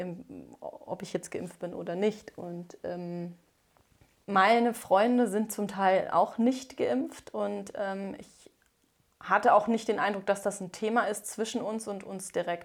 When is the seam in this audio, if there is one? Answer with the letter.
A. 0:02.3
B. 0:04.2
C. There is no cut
C